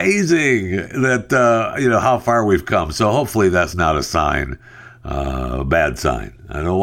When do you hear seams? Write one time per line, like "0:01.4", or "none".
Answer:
0:03.7